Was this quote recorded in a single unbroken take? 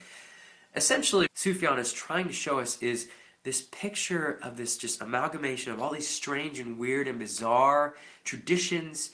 no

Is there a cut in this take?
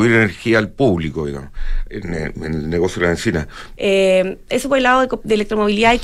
yes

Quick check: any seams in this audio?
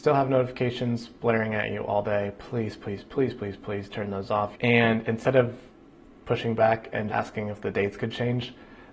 yes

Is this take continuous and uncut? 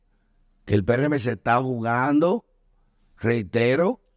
yes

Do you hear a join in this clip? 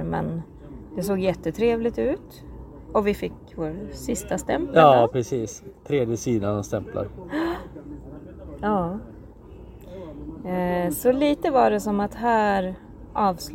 no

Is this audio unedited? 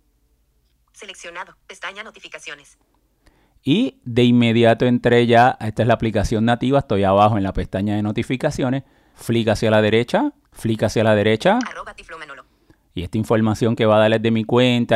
no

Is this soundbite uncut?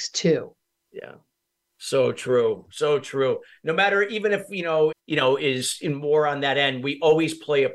no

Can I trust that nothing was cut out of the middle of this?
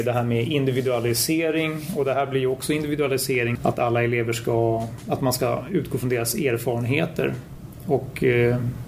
no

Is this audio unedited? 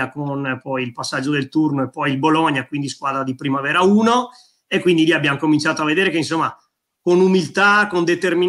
yes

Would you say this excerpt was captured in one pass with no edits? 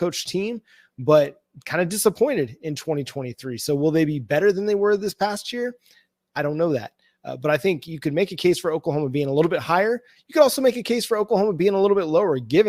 yes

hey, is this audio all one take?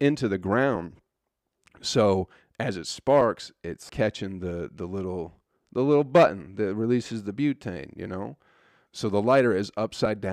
no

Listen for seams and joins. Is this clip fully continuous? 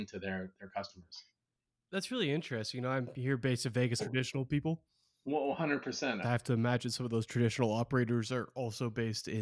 no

